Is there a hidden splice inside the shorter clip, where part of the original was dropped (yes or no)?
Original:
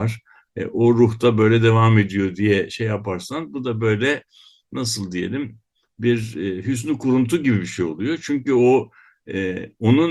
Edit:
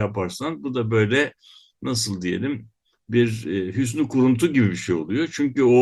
no